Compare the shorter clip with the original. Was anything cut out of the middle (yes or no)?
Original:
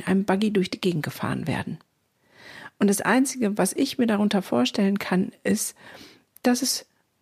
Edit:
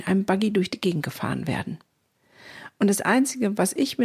no